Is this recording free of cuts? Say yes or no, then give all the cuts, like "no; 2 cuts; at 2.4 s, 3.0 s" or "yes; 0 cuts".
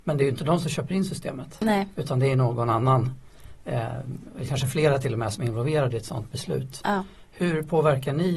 yes; 0 cuts